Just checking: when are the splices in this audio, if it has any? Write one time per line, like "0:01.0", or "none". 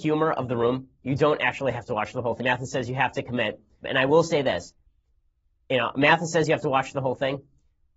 0:02.4
0:03.8